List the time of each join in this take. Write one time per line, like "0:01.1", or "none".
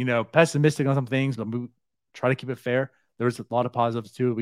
0:01.4